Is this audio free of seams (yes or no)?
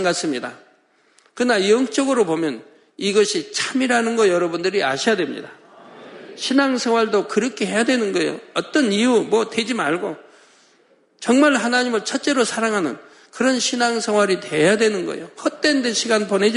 yes